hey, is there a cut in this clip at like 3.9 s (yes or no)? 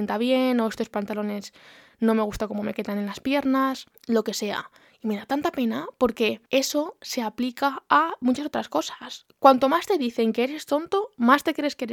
yes